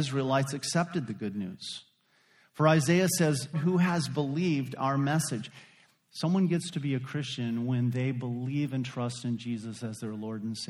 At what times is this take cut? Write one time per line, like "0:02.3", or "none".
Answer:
0:03.5
0:06.1